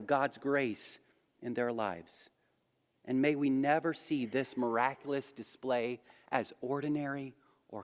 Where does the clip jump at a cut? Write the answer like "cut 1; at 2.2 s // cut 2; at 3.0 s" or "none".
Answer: none